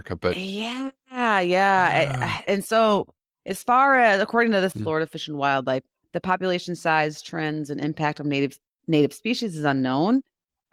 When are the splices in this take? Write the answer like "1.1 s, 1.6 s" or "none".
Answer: 4.7 s